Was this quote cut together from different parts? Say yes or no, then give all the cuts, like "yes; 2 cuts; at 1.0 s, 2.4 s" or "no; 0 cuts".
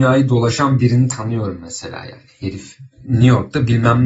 no; 0 cuts